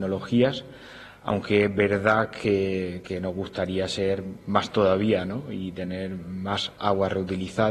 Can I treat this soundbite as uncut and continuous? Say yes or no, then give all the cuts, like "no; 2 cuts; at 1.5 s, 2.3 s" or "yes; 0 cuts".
yes; 0 cuts